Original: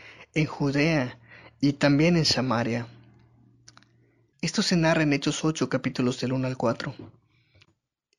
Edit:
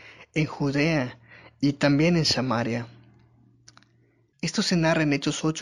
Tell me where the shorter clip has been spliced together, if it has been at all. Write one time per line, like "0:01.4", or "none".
none

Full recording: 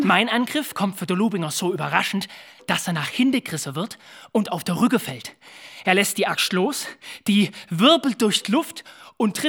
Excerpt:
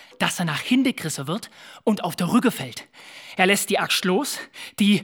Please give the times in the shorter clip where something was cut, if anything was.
none

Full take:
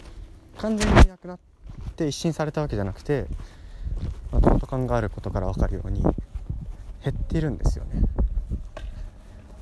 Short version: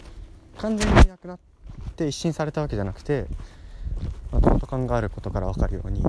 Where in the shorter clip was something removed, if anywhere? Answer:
none

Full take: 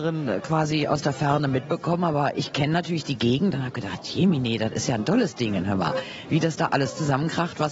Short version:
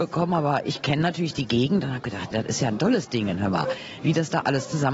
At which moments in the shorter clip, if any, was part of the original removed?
0:02.3

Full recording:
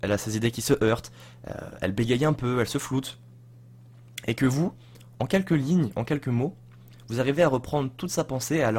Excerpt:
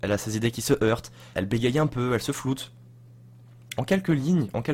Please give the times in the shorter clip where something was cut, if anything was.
0:01.3
0:03.8

